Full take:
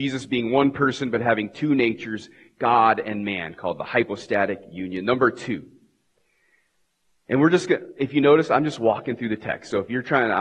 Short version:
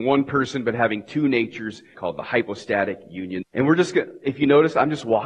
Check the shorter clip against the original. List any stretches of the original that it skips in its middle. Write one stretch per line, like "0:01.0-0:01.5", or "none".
0:02.4-0:03.6
0:05.0-0:07.2